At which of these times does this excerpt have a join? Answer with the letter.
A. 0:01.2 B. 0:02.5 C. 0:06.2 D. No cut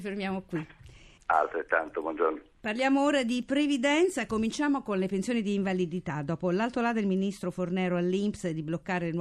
A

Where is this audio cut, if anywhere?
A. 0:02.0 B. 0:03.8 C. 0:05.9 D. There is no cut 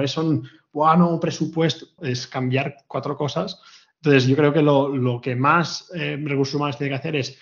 A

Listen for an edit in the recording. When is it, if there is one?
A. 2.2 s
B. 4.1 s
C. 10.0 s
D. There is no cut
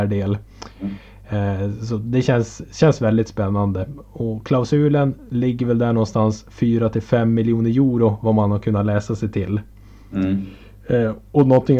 D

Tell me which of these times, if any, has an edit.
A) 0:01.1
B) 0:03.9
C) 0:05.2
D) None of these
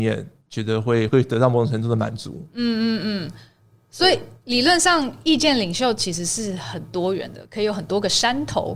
A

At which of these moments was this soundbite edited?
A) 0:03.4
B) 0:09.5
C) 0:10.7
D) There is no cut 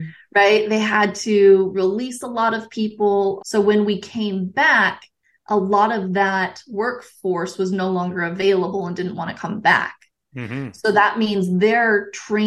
A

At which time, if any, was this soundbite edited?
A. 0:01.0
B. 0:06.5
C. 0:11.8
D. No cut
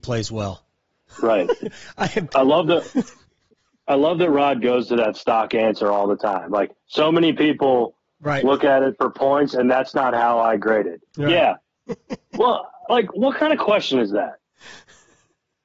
C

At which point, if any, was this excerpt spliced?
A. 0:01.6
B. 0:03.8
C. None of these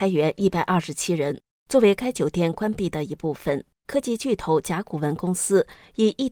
B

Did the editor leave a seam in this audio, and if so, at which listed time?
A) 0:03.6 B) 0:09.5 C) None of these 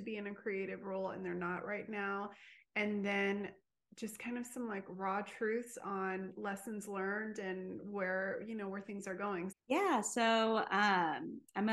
B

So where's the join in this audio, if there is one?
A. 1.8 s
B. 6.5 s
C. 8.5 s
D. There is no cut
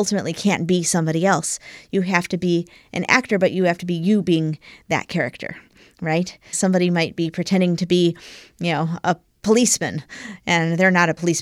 B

